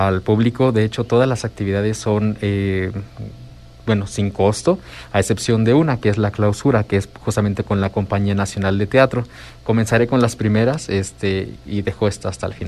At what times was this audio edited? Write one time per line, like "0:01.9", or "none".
none

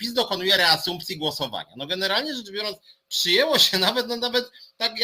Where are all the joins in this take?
none

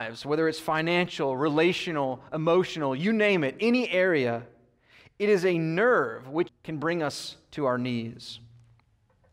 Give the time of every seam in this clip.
0:06.5

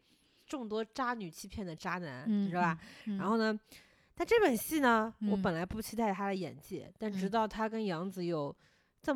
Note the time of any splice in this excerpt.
none

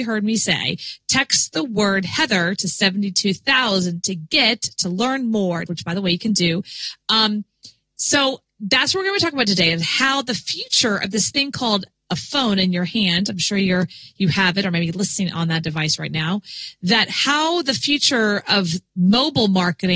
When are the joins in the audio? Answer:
0:05.7

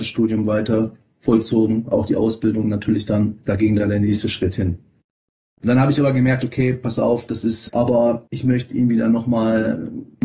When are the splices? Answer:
0:05.5
0:07.7

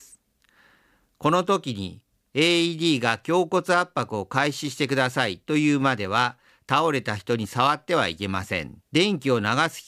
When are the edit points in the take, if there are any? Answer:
0:08.8

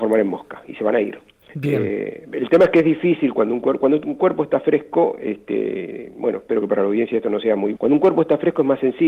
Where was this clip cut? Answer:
0:01.4
0:07.7

